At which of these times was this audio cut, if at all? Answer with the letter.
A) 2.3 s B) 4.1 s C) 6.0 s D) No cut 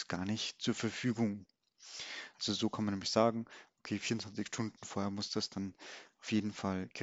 A